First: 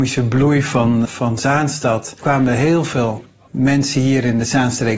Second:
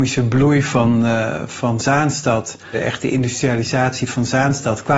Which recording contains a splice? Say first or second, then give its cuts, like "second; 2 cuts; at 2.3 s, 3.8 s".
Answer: first; 2 cuts; at 1.0 s, 2.2 s